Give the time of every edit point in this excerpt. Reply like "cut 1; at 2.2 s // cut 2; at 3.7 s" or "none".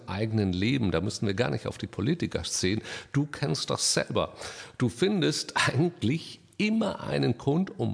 none